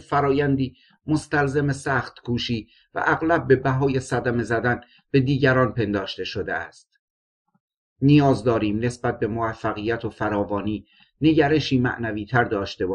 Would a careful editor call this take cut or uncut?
uncut